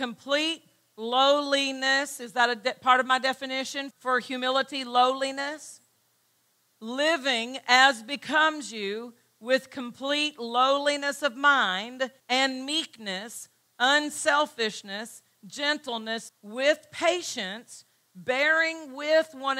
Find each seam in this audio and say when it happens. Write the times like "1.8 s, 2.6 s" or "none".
3.9 s, 12.2 s, 16.3 s